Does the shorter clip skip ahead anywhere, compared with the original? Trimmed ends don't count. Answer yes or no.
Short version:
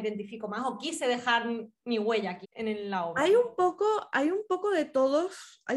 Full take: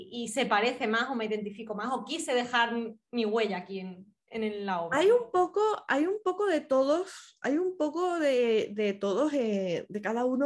yes